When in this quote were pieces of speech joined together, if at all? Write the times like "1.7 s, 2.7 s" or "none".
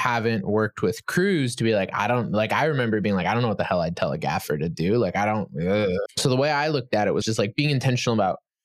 6.1 s, 7.2 s